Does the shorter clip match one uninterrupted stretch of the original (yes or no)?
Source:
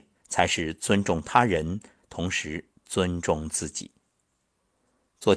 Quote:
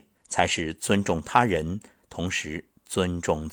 yes